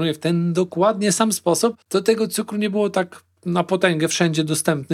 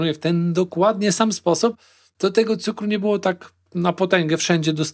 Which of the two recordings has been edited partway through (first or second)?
first